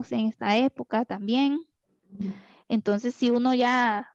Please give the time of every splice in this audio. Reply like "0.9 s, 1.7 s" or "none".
none

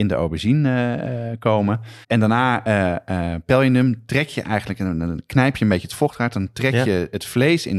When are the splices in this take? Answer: 2.0 s

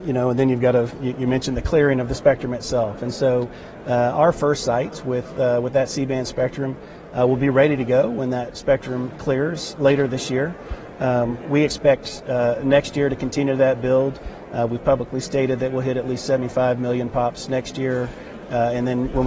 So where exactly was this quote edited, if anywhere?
none

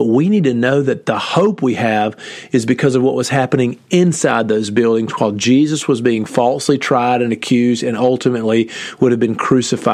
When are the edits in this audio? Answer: none

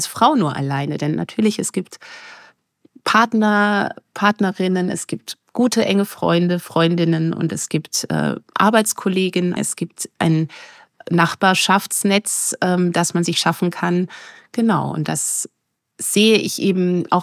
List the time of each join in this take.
9.6 s

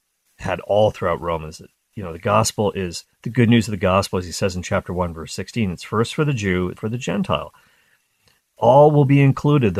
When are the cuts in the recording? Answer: 6.7 s

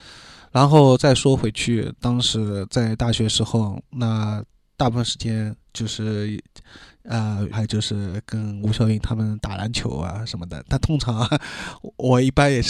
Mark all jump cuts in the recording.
7.5 s

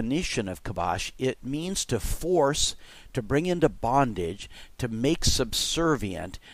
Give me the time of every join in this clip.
none

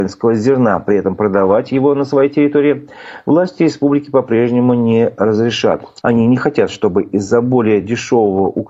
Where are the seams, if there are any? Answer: 6.0 s

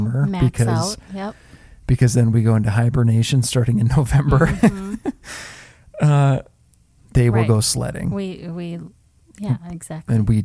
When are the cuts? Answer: 7.0 s

